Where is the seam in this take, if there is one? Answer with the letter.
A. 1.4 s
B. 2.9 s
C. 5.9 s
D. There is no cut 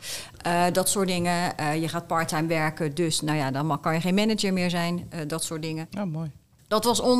C